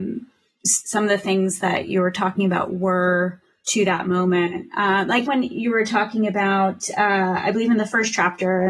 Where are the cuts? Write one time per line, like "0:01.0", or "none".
0:05.3